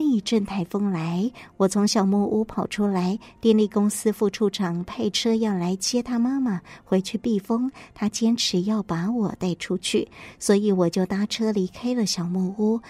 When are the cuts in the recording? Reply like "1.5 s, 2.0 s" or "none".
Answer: none